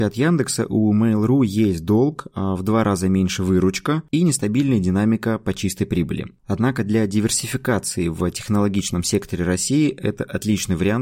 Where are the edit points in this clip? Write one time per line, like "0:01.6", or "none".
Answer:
none